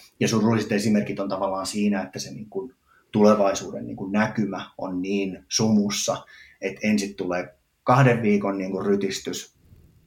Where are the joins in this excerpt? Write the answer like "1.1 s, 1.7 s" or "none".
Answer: none